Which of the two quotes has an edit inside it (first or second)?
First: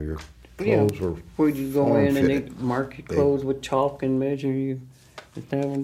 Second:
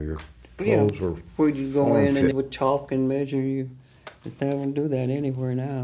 second